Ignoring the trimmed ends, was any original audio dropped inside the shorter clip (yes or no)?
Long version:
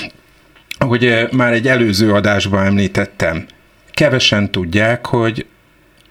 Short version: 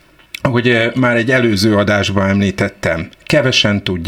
yes